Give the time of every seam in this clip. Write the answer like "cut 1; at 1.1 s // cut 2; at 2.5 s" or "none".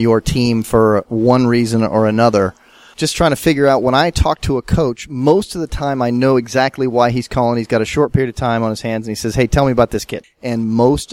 cut 1; at 10.2 s